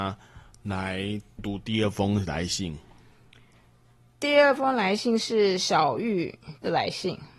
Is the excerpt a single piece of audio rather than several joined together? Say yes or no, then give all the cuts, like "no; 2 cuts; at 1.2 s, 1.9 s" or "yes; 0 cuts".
no; 1 cut; at 1.4 s